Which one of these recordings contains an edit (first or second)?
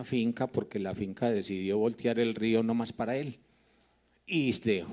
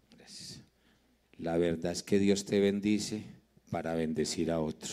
second